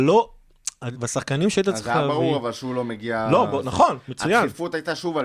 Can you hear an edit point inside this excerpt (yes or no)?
yes